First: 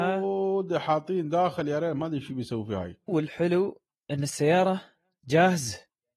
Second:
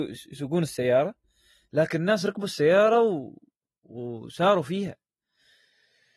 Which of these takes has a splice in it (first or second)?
first